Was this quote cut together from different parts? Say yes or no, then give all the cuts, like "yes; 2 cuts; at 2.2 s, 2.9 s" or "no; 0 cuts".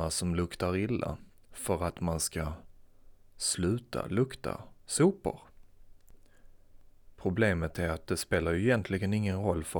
no; 0 cuts